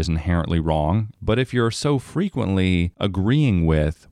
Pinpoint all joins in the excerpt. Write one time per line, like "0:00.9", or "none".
0:01.1